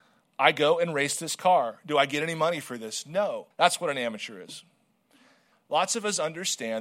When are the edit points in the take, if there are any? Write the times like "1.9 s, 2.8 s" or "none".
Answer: 3.5 s, 5.5 s